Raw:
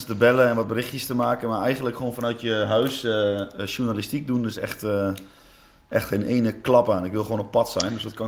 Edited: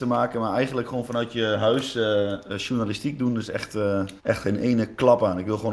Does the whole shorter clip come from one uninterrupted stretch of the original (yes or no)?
no